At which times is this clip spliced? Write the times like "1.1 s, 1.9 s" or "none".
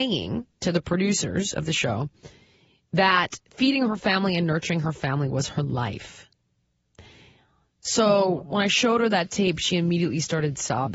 none